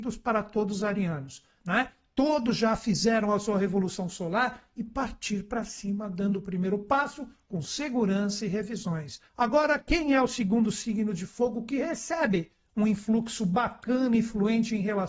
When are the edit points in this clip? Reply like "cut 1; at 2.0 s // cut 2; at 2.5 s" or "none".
cut 1; at 1.6 s // cut 2; at 9.3 s